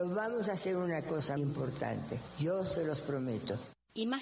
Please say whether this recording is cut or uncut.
cut